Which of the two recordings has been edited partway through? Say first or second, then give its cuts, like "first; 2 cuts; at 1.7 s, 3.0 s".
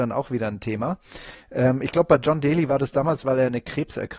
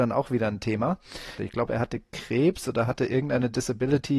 second; 1 cut; at 1.4 s